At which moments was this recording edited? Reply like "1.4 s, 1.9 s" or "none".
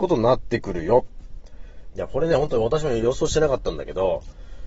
1.9 s

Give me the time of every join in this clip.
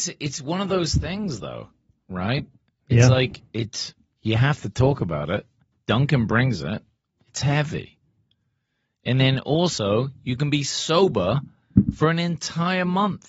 none

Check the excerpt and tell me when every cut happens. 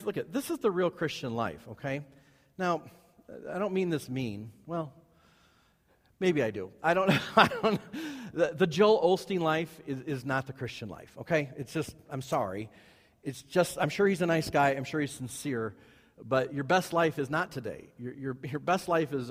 none

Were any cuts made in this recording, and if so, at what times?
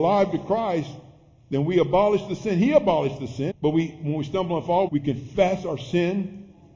3.5 s, 4.9 s

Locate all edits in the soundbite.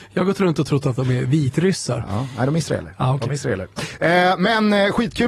none

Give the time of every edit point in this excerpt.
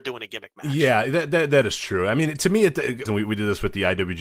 3.1 s

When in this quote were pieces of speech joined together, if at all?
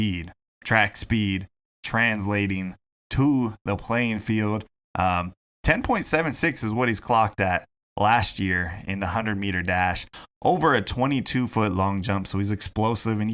4.8 s

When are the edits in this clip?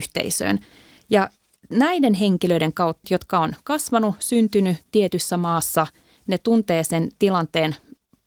3.0 s

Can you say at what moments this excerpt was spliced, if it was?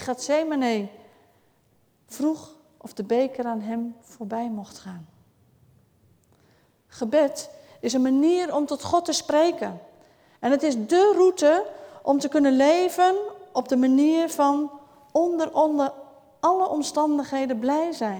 none

